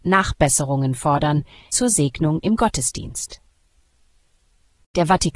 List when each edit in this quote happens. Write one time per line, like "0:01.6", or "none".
0:01.7